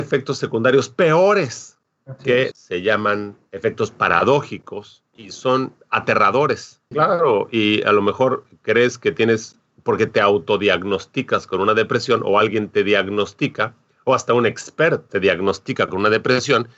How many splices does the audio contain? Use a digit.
3